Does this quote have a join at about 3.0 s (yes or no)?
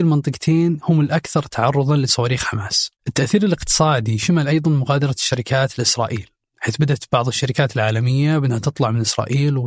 yes